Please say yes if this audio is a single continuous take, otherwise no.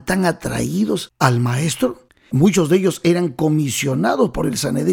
no